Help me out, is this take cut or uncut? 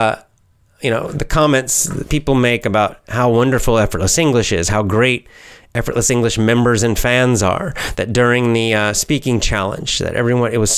uncut